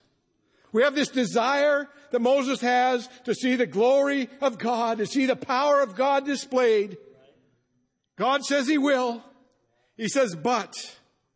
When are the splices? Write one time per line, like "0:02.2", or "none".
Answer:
none